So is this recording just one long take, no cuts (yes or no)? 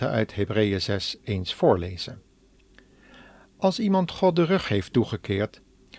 yes